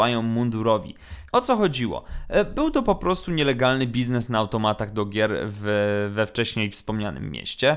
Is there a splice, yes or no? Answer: yes